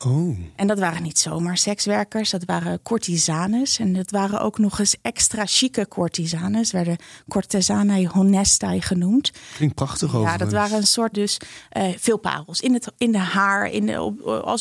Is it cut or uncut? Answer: cut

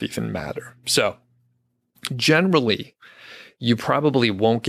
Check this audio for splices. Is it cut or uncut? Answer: uncut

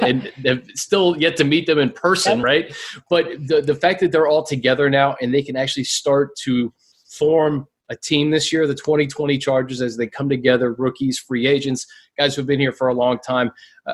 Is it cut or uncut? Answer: uncut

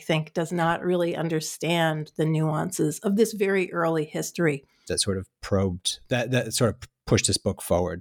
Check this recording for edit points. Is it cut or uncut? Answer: cut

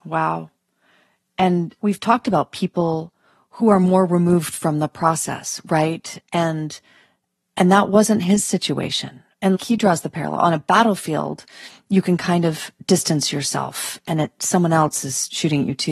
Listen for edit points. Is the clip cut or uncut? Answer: uncut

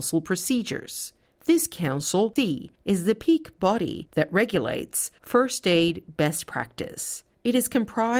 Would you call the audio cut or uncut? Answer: cut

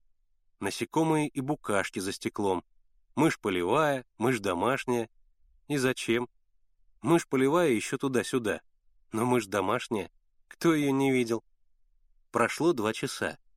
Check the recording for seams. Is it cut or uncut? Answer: uncut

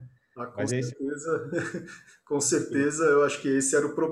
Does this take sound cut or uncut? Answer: uncut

